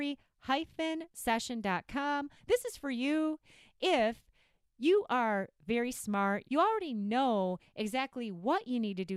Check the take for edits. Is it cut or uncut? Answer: cut